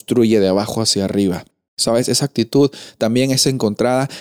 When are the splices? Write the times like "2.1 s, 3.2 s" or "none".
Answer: 1.7 s